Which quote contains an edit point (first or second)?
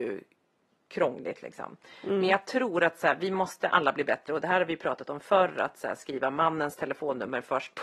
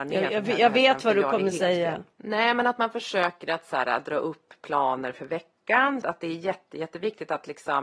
second